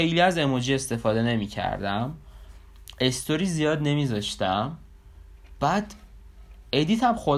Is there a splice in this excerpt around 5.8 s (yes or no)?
no